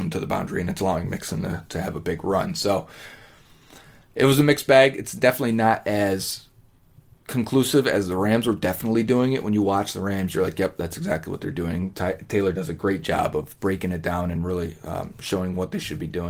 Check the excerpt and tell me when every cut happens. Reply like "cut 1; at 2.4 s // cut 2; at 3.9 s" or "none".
none